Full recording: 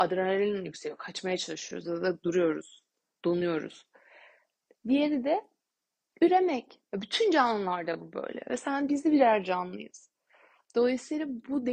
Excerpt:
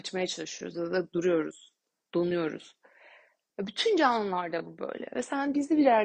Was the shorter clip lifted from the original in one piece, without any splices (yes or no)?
no